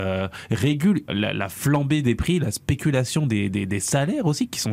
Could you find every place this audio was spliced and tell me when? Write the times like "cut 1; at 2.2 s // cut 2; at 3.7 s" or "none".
cut 1; at 1.1 s